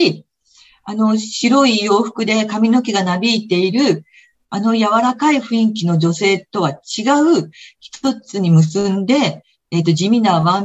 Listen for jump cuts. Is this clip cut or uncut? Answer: uncut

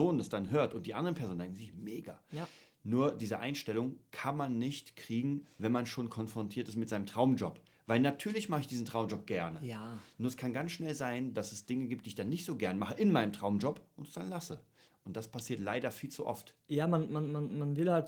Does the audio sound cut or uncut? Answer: uncut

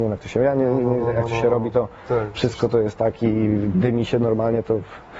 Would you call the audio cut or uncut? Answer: uncut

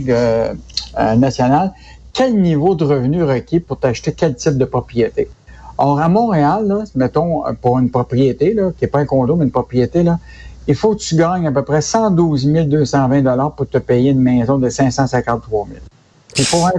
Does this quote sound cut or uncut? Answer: uncut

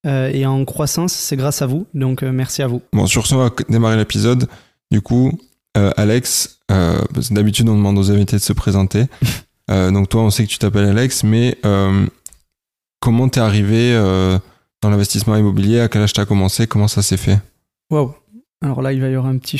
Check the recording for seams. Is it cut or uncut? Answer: uncut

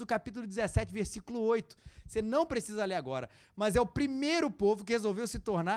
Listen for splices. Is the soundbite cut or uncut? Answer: uncut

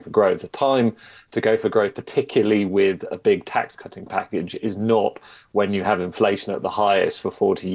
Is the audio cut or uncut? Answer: uncut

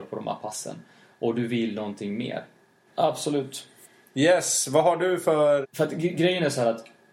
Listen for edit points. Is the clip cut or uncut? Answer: cut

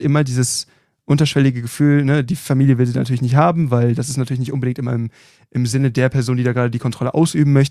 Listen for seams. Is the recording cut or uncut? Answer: uncut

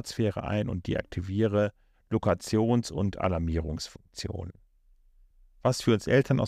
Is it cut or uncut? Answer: uncut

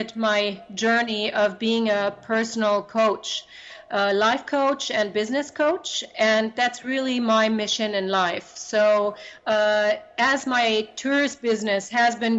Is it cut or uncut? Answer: uncut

